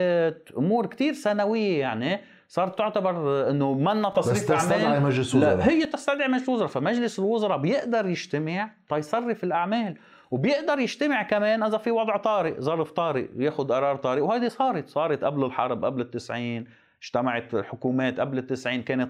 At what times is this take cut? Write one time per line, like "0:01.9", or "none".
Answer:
none